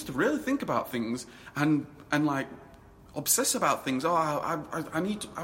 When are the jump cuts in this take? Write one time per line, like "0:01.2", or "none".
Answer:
none